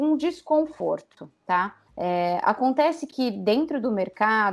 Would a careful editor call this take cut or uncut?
cut